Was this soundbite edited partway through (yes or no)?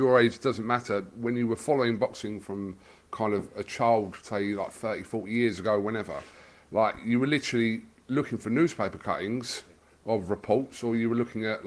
no